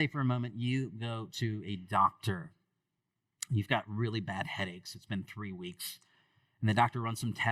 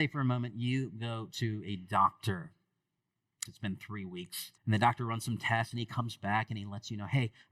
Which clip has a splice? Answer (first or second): second